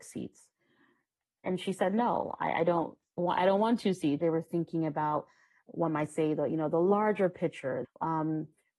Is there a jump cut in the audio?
yes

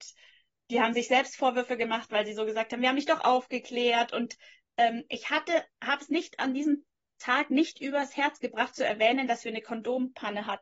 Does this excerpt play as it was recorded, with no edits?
yes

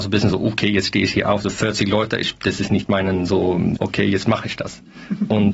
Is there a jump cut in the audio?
yes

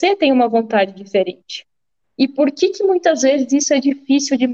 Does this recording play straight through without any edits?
no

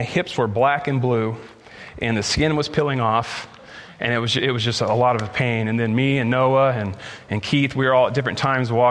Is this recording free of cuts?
yes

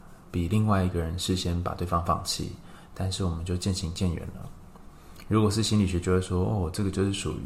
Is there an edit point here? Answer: no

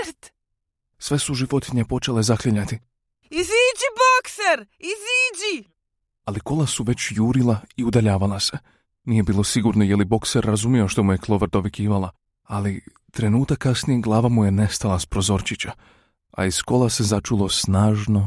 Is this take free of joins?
yes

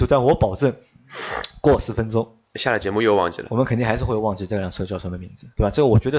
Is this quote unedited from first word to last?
yes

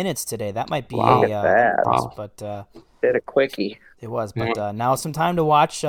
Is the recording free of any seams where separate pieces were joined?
no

